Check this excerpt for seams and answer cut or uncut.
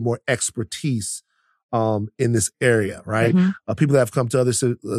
uncut